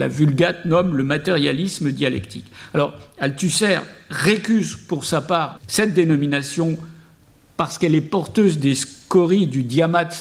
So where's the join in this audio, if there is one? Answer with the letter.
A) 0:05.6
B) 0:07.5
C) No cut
A